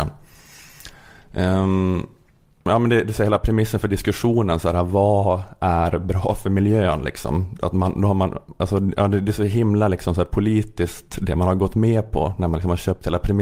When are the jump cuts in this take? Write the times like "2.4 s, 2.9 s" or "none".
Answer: none